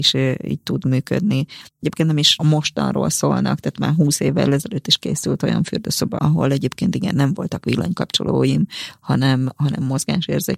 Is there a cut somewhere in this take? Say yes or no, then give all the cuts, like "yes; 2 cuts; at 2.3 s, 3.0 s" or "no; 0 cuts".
yes; 2 cuts; at 1.7 s, 6.2 s